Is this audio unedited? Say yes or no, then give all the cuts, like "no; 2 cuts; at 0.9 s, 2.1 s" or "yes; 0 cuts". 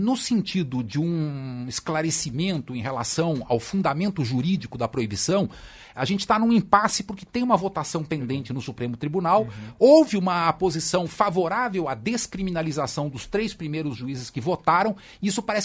yes; 0 cuts